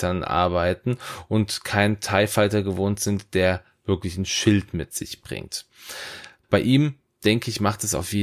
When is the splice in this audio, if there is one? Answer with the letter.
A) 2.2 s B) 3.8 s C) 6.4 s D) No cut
C